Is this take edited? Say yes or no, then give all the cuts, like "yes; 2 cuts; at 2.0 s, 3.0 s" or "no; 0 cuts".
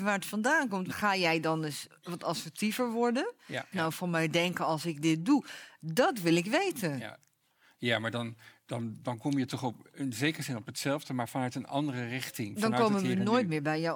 yes; 2 cuts; at 0.9 s, 3.7 s